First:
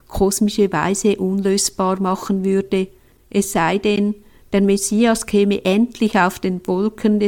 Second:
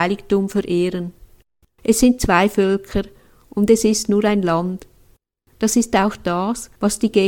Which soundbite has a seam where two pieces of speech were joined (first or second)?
second